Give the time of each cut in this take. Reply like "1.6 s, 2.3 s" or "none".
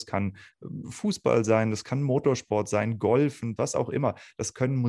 3.6 s